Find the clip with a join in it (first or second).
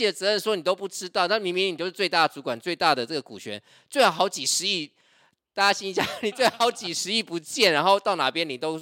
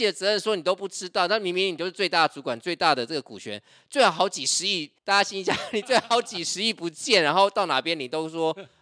second